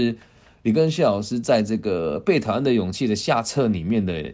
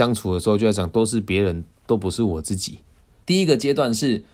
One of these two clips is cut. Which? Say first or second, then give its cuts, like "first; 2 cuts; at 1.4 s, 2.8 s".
second; 1 cut; at 3.2 s